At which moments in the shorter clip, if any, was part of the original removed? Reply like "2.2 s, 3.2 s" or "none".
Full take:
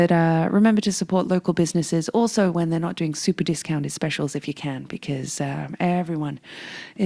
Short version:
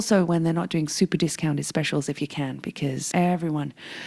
3.1 s